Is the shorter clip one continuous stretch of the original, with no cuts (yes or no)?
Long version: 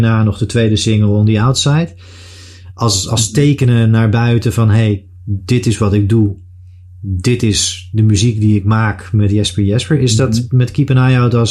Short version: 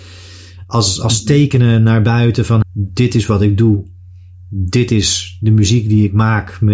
no